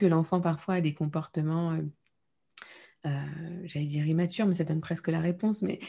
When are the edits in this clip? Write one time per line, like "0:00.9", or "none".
none